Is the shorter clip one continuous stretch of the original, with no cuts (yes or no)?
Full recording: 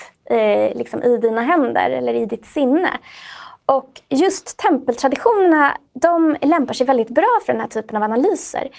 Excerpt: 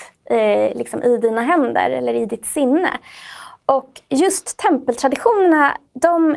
yes